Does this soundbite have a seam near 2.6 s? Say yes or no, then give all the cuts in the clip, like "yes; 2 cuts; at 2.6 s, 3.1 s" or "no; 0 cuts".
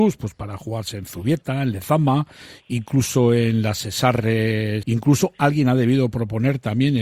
no; 1 cut; at 4.8 s